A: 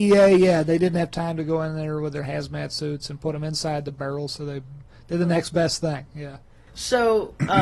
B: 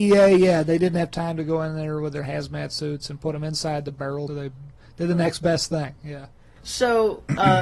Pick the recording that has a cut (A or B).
B